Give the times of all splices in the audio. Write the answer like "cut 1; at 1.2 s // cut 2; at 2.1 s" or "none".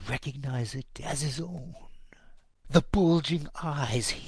cut 1; at 2.6 s